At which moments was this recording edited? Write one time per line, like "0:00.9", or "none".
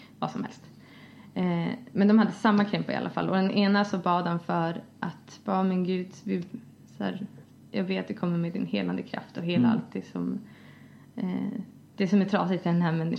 none